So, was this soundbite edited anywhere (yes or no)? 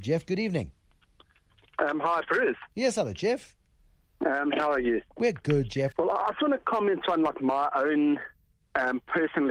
yes